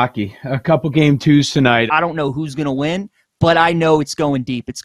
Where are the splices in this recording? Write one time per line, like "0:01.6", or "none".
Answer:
0:01.9